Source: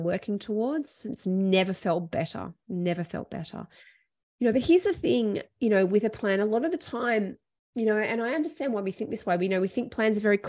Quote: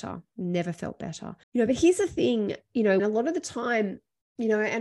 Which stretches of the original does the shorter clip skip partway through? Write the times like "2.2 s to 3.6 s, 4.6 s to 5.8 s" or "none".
3.7 s to 4.3 s, 5.9 s to 6.4 s